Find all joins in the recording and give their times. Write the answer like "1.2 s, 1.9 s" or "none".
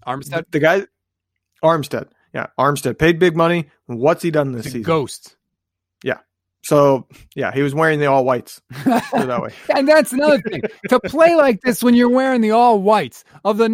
none